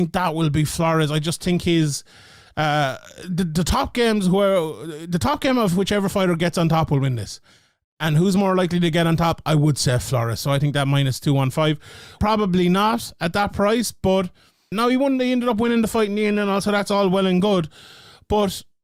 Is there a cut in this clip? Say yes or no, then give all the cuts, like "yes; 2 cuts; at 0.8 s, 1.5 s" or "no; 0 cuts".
yes; 2 cuts; at 12.2 s, 14.7 s